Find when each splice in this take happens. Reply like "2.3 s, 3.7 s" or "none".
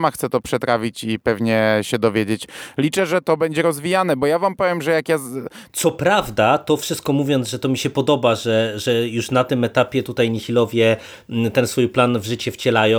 5.7 s